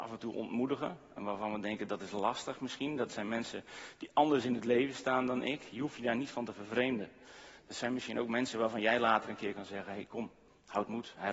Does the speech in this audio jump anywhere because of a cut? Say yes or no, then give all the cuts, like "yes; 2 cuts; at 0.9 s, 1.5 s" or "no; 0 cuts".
no; 0 cuts